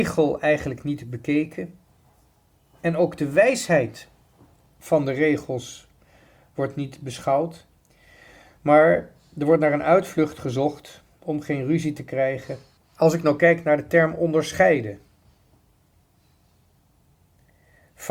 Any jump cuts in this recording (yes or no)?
yes